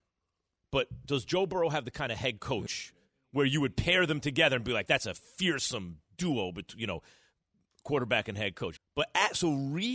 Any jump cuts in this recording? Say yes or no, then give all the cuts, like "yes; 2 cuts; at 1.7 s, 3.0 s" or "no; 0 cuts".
yes; 2 cuts; at 4.9 s, 8.8 s